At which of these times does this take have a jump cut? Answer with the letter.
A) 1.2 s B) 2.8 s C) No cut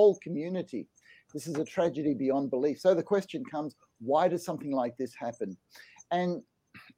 C